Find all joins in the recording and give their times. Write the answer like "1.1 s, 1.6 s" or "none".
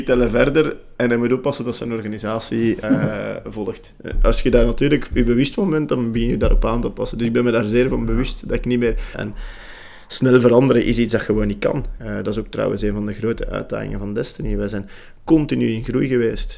2.8 s, 9.1 s, 12.0 s